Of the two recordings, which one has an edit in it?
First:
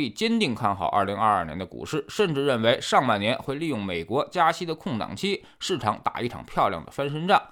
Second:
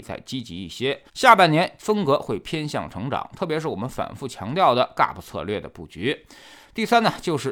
second; 1 cut; at 1.1 s

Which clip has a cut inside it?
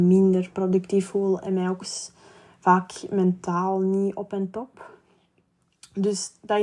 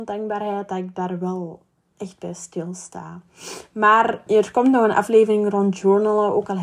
second; 1 cut; at 4.3 s

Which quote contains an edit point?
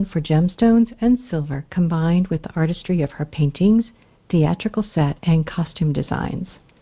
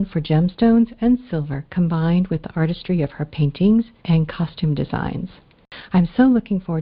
second; 1 cut; at 4.0 s

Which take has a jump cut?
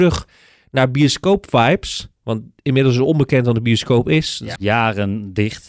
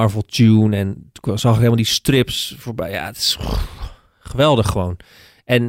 first; 1 cut; at 4.6 s

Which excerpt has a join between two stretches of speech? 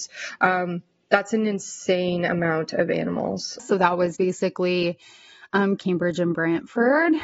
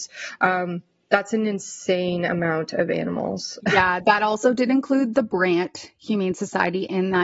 first; 2 cuts; at 3.6 s, 5.8 s

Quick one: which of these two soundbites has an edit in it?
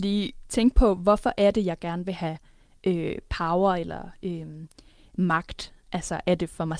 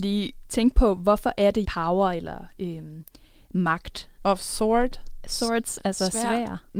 second; 2 cuts; at 1.6 s, 4.2 s

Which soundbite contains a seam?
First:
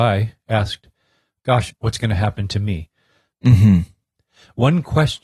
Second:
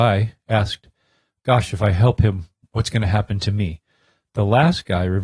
first; 2 cuts; at 1.7 s, 3.3 s

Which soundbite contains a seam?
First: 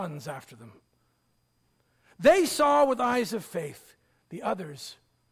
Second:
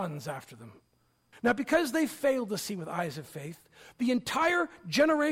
second; 1 cut; at 1.3 s

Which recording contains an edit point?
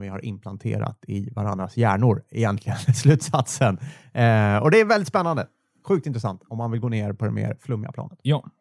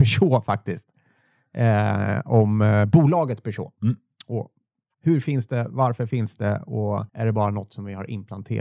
second; 2 cuts; at 4.9 s, 7.1 s

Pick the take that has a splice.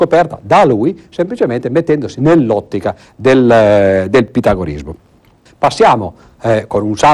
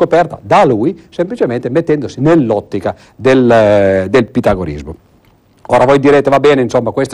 first; 1 cut; at 5.5 s

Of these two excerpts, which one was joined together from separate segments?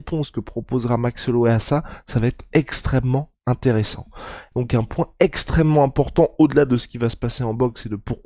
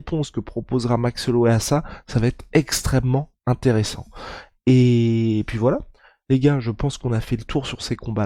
first; 1 cut; at 4.5 s

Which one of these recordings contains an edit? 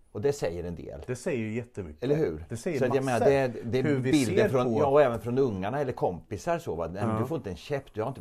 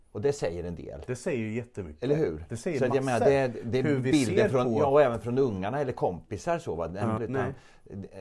second; 1 cut; at 7.2 s

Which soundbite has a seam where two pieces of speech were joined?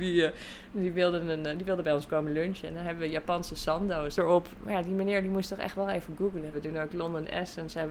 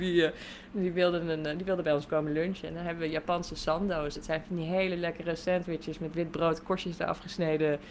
first; 2 cuts; at 4.2 s, 6.5 s

